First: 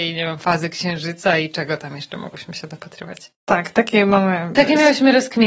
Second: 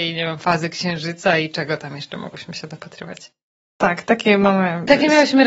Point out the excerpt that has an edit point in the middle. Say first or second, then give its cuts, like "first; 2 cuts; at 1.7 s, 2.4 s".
first; 1 cut; at 3.4 s